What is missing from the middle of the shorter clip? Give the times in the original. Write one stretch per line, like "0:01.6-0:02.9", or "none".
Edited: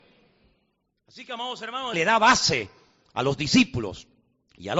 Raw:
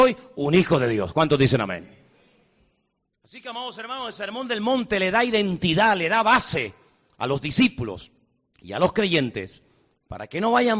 0:04.1-0:06.0